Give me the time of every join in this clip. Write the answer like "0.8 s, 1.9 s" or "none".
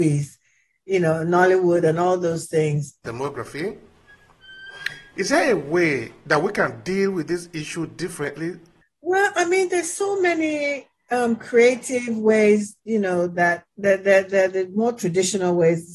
3.0 s